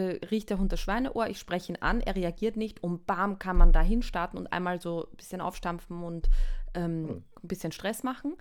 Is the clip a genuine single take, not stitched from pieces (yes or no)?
yes